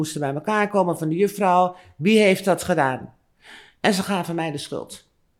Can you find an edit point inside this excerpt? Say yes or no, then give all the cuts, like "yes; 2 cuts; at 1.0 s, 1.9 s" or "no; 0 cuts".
no; 0 cuts